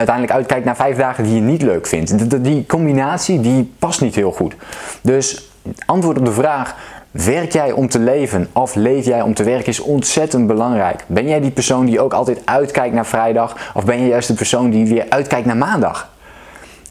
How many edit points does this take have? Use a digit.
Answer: 0